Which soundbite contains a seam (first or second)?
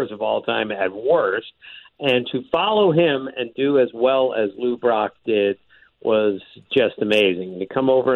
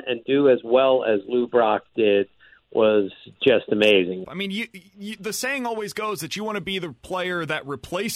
second